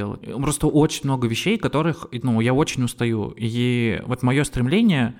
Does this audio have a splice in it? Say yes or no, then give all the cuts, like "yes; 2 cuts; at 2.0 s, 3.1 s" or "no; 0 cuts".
no; 0 cuts